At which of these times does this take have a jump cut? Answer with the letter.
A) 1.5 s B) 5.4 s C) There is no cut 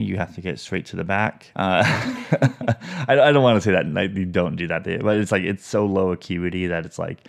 A